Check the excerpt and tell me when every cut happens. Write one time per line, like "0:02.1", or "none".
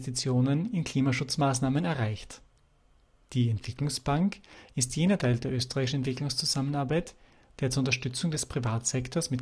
none